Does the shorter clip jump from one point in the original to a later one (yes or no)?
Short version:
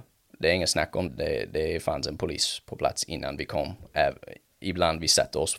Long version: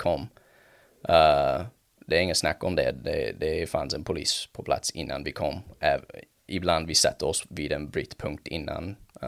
yes